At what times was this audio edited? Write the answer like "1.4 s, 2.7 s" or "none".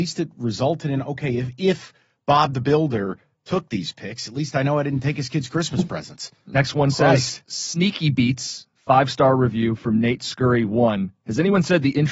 none